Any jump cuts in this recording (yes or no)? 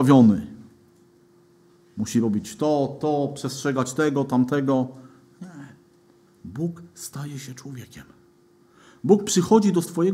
yes